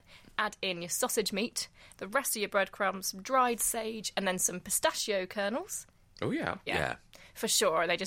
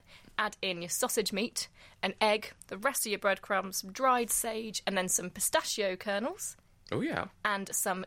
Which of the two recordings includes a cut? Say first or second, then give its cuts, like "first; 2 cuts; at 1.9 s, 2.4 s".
first; 2 cuts; at 1.9 s, 6.7 s